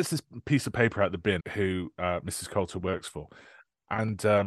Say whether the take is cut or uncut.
cut